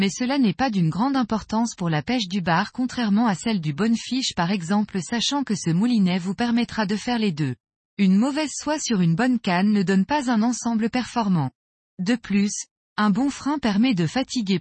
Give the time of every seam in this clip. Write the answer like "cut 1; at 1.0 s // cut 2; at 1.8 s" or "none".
cut 1; at 7.9 s // cut 2; at 11.8 s